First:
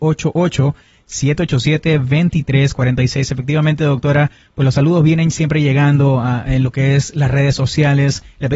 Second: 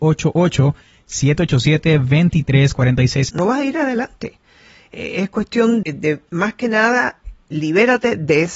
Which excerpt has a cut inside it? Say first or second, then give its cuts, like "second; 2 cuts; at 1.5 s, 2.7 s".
second; 2 cuts; at 3.3 s, 5.8 s